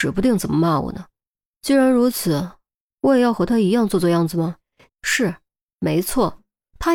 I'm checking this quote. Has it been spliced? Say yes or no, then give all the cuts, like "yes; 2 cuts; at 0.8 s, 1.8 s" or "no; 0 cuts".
yes; 2 cuts; at 2.8 s, 4.9 s